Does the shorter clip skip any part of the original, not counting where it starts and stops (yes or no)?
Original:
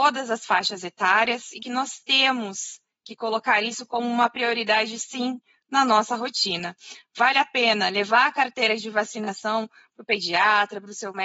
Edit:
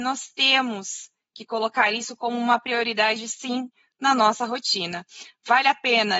no